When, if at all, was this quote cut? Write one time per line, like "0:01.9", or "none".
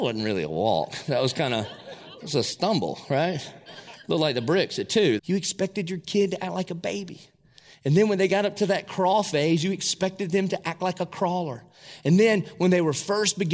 0:05.2